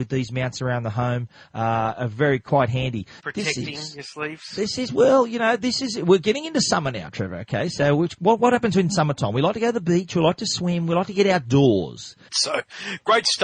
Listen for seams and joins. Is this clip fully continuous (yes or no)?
no